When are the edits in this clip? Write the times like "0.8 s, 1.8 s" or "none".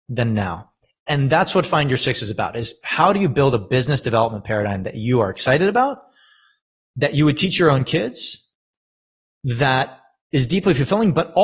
none